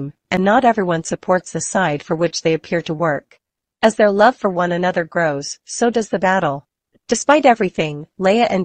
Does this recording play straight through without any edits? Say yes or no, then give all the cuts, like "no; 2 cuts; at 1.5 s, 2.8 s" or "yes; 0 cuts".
yes; 0 cuts